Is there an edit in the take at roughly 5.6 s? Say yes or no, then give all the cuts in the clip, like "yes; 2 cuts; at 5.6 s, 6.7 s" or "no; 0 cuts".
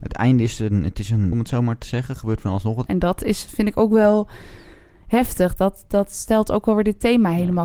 no; 2 cuts; at 1.3 s, 2.9 s